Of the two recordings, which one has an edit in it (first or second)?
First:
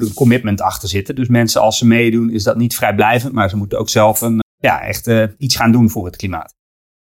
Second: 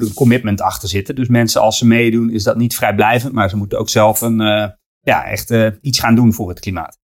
first